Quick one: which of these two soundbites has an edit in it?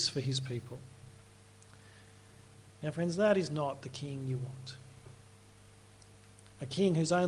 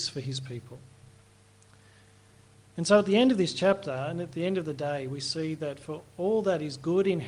first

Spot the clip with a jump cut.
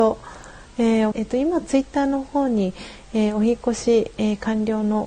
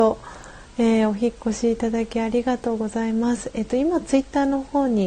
first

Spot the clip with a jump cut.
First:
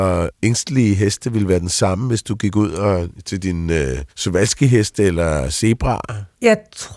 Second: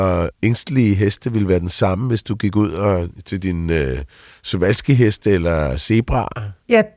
first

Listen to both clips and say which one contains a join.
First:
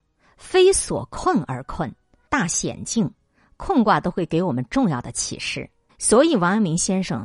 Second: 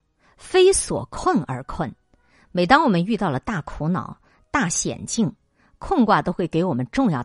first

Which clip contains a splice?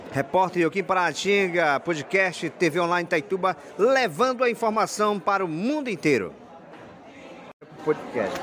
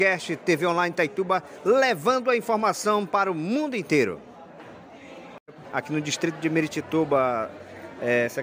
second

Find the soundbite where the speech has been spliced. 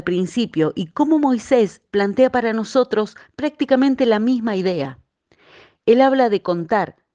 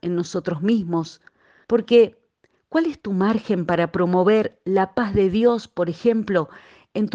second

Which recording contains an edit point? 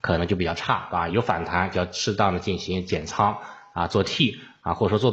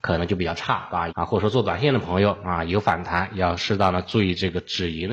second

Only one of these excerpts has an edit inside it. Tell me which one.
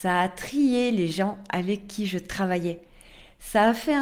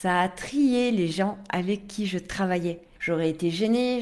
second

